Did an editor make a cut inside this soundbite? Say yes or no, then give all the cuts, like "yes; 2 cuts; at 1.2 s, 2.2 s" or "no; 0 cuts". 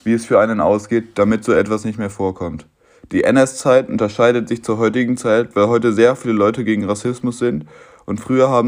no; 0 cuts